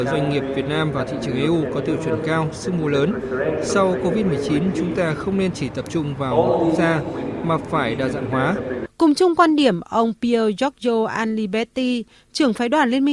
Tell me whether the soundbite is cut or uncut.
cut